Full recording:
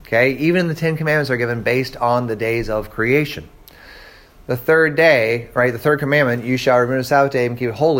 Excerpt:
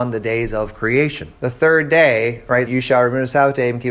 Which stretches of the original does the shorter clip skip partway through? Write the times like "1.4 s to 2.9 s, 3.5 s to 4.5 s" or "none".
3.5 s to 4.4 s, 5.7 s to 6.4 s